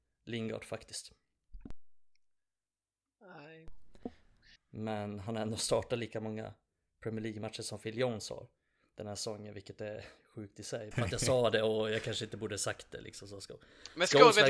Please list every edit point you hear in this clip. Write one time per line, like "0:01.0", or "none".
0:04.6
0:10.9